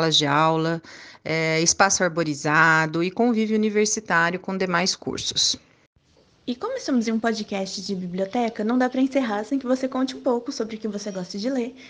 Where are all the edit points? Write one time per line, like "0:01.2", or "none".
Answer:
none